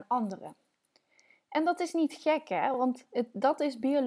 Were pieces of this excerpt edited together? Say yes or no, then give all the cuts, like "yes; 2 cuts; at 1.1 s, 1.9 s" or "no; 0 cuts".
no; 0 cuts